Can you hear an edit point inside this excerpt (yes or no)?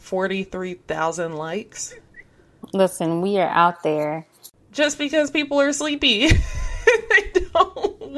no